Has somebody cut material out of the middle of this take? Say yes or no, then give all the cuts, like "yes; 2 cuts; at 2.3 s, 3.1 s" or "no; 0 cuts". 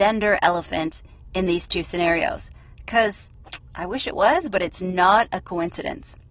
no; 0 cuts